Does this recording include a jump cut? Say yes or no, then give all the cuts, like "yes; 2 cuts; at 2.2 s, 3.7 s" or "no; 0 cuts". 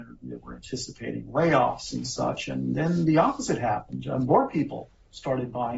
no; 0 cuts